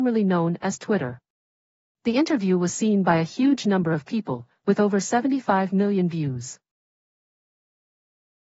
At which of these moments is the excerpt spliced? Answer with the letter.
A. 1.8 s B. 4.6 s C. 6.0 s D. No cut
D